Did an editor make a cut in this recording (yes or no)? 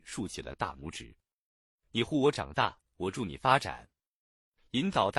no